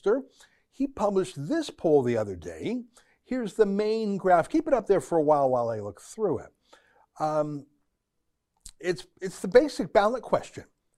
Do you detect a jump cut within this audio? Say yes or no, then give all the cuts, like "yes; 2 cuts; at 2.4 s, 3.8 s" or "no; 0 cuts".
no; 0 cuts